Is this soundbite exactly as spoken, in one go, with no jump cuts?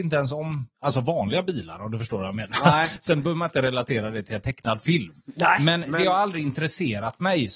yes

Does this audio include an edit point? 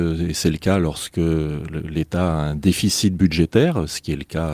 no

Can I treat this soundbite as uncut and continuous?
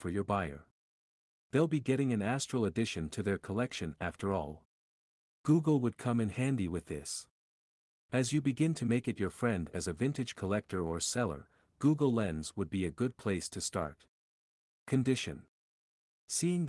yes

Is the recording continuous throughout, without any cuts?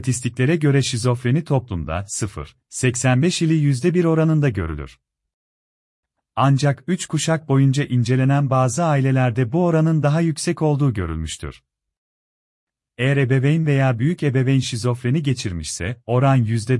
yes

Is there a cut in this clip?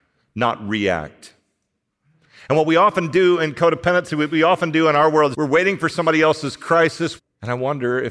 yes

